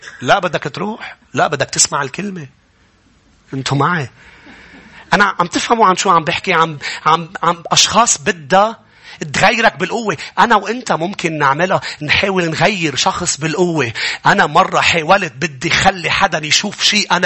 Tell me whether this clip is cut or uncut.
uncut